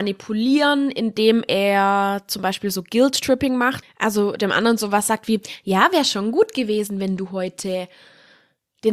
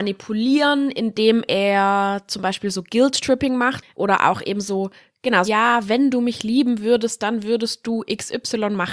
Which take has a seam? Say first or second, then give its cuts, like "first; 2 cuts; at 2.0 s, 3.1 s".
second; 2 cuts; at 3.9 s, 5.5 s